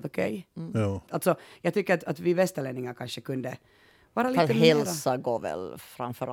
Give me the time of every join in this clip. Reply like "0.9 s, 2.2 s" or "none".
1.1 s